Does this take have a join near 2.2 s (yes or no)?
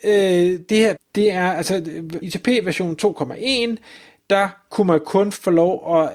yes